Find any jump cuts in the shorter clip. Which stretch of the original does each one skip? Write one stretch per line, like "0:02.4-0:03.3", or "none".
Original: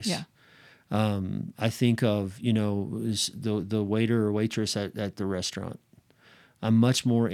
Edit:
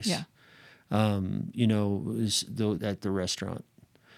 0:01.5-0:02.4
0:03.6-0:04.9